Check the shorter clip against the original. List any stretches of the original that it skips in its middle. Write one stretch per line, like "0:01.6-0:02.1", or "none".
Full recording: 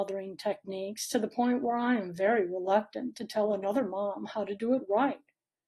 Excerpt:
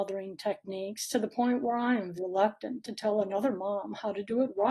0:02.2-0:02.5